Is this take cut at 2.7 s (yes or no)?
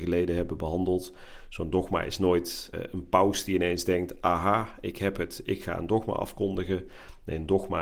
yes